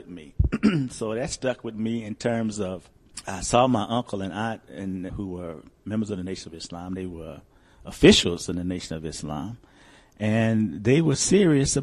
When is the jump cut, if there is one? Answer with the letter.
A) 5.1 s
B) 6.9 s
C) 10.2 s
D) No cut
A